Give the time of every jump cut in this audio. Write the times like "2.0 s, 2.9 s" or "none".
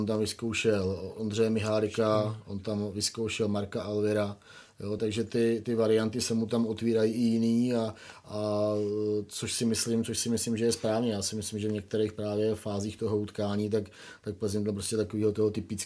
5.0 s